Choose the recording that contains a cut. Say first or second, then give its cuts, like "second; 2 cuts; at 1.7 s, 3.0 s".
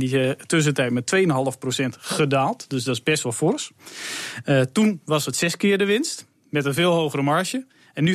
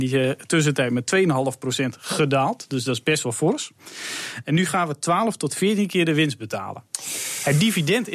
second; 1 cut; at 4.4 s